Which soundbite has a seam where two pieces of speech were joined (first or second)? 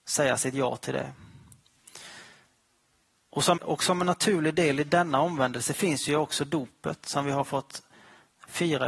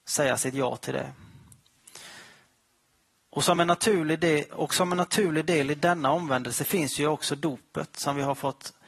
first